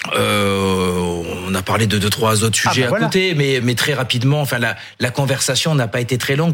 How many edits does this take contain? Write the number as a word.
one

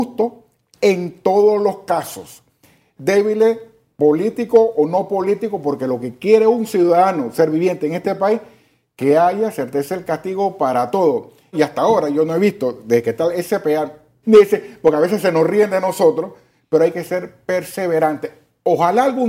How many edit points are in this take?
three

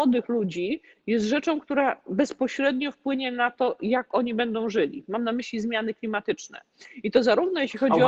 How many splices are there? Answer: zero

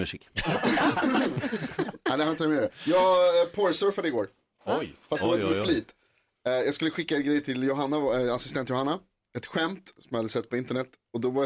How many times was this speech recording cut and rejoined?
zero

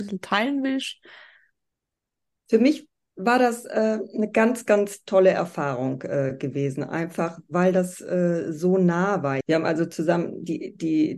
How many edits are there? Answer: one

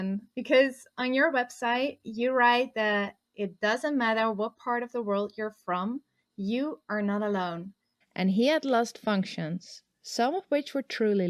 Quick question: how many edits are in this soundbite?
one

